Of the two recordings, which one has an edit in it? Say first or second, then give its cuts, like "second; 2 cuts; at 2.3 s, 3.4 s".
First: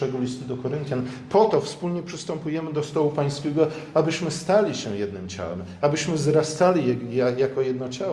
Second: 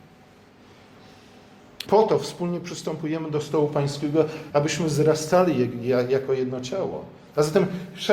second; 2 cuts; at 1.9 s, 4.5 s